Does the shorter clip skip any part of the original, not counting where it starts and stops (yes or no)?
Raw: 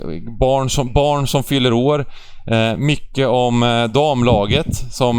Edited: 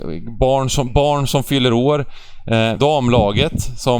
yes